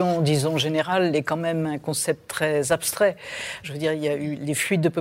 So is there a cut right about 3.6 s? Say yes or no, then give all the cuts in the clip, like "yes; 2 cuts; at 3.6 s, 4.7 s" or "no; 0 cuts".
yes; 1 cut; at 3.6 s